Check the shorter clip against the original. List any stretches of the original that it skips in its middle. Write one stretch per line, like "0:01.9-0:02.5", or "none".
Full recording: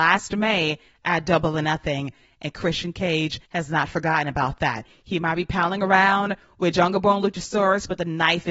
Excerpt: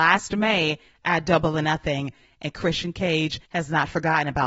none